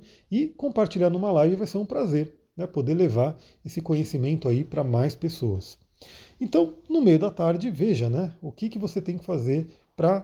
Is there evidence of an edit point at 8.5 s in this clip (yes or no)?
no